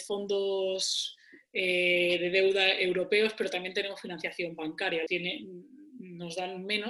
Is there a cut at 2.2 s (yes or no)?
no